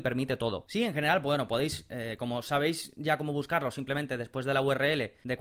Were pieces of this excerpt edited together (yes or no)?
no